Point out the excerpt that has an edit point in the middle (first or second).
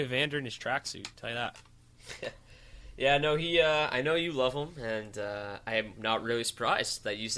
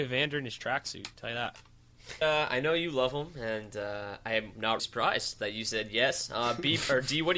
second